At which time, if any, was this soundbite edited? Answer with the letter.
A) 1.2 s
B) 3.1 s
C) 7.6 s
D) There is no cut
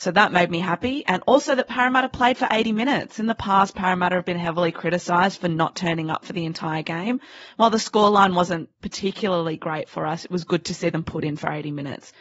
D